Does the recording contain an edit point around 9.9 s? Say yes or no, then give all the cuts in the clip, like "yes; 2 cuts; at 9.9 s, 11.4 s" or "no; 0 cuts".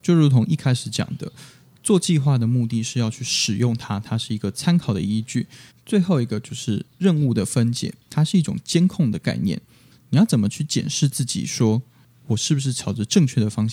yes; 2 cuts; at 5.7 s, 9.9 s